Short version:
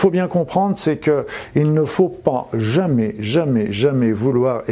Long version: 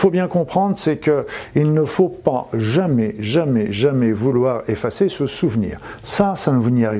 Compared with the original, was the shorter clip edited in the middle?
no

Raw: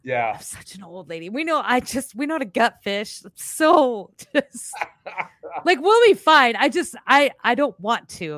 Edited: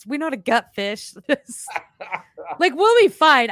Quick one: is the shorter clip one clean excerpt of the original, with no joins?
no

